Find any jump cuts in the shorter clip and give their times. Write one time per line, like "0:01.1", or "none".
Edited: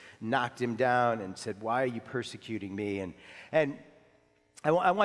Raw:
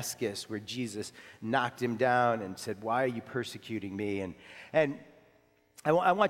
none

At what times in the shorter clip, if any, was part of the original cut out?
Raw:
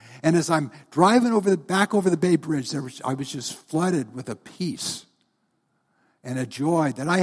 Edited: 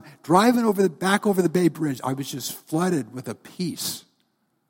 0:02.0

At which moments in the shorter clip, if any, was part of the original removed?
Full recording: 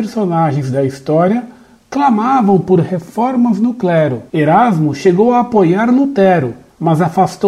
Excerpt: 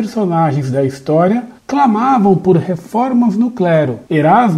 0:01.6

